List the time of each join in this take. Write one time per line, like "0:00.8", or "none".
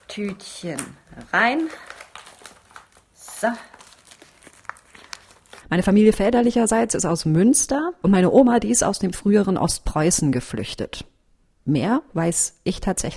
0:05.6
0:08.0

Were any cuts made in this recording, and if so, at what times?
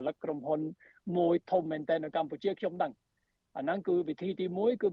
none

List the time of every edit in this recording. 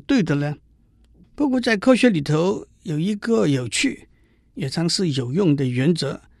0:01.2
0:04.7

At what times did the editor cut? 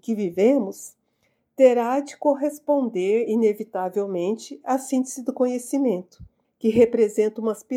none

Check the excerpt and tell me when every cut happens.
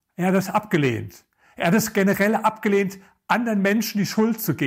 none

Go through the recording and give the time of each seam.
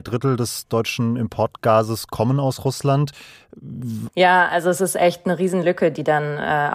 0:04.1

